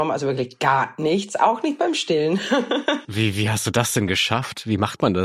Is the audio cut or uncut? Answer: cut